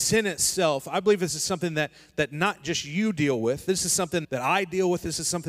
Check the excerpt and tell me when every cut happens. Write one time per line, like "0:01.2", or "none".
0:04.2